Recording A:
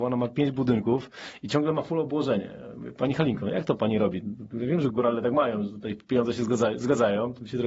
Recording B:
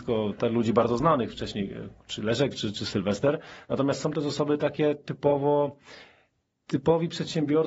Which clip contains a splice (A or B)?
A